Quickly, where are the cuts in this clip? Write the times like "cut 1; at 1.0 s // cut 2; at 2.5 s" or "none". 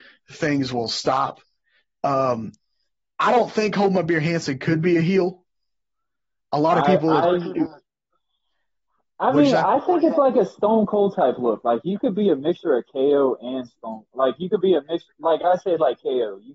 none